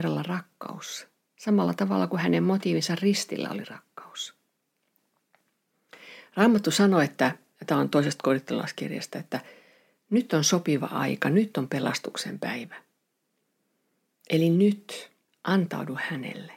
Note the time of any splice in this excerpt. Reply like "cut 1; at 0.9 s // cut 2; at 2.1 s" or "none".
cut 1; at 15.3 s